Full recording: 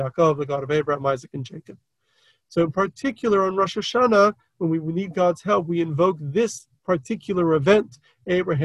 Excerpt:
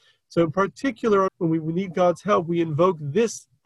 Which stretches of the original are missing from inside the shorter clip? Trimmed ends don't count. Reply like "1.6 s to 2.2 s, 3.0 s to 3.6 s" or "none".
3.5 s to 4.5 s